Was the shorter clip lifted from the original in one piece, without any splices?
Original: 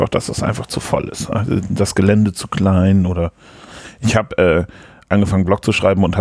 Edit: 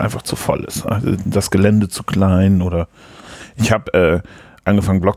yes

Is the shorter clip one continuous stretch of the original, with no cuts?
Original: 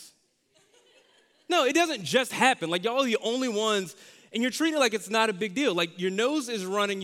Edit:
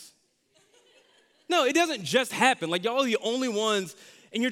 yes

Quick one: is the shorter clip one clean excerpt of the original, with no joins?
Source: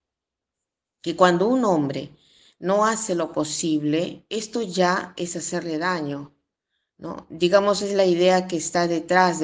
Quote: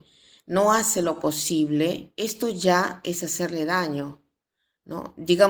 yes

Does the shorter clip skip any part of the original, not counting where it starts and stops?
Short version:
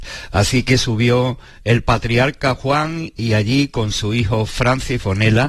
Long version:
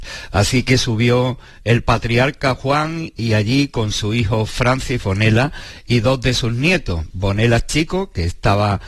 no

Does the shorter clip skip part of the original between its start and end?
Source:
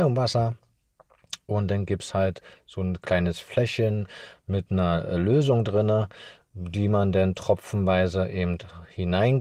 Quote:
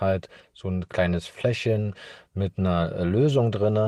no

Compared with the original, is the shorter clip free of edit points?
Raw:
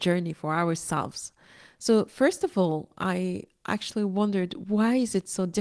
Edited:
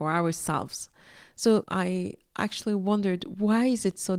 no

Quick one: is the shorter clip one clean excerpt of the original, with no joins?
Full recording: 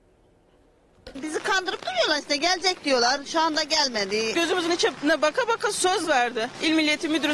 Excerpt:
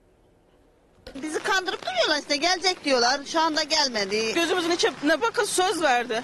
no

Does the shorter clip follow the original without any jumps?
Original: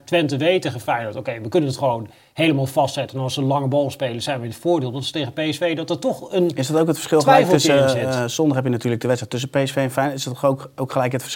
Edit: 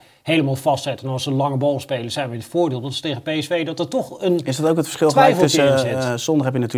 yes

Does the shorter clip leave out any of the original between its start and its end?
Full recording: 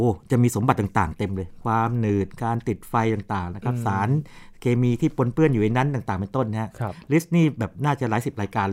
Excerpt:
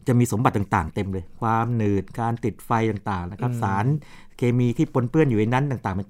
no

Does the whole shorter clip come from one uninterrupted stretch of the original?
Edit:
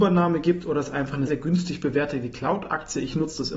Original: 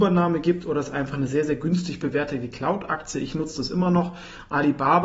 no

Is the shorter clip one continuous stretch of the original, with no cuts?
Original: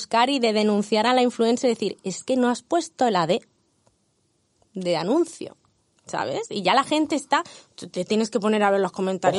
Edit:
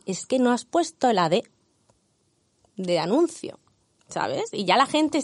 yes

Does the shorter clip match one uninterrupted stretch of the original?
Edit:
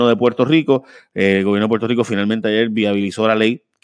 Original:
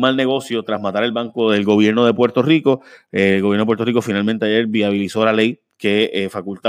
yes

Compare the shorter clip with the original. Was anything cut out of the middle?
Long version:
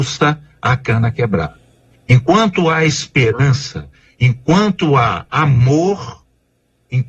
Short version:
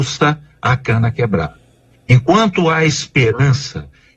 no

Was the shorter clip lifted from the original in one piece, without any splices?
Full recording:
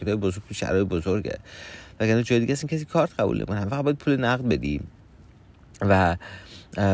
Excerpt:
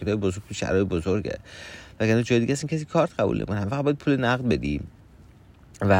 yes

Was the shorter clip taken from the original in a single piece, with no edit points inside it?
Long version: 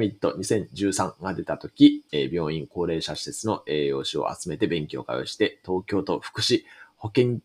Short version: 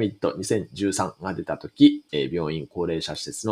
yes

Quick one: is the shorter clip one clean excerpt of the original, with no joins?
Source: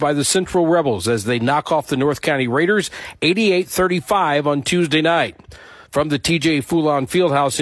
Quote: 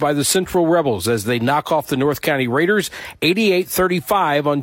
yes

